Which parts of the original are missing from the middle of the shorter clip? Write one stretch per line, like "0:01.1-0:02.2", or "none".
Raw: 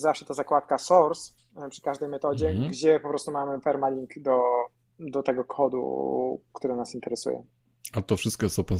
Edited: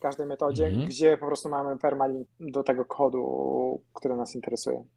0:04.1-0:04.9

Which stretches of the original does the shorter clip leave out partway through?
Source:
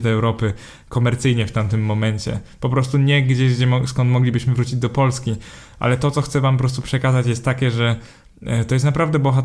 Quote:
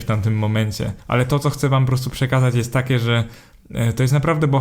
0:02.5-0:05.7

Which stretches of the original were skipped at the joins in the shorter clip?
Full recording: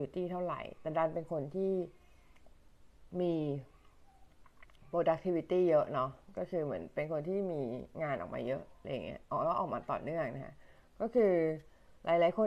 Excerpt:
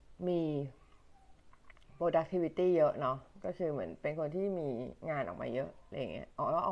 none

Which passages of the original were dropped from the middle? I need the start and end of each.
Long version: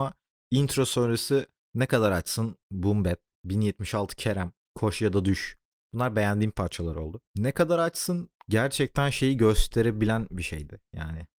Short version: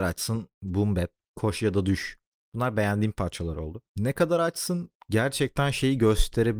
0:03.3-0:04.6

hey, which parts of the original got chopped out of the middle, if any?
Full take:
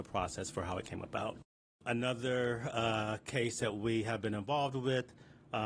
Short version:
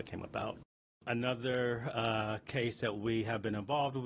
none

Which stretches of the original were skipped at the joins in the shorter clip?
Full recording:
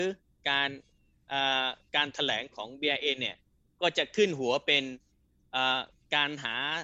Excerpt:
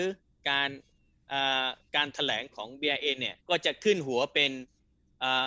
0:03.4-0:03.7

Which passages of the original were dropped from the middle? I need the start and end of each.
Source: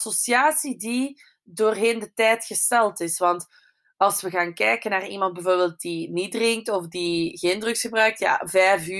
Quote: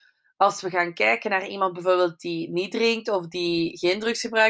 none

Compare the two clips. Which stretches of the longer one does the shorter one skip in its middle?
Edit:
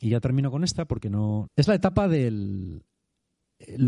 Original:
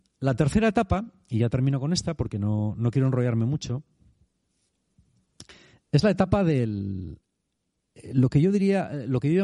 0:02.7-0:05.8

